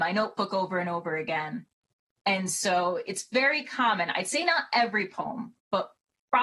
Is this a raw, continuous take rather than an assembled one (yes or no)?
yes